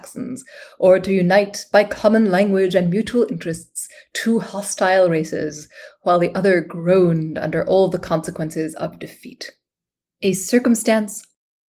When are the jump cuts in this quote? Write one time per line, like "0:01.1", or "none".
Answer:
0:05.9
0:10.1